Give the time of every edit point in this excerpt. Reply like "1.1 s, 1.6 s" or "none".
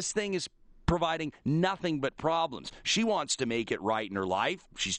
none